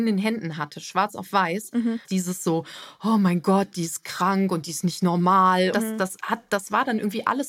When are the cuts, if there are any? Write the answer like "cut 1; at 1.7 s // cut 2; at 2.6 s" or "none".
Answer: cut 1; at 2.0 s // cut 2; at 5.7 s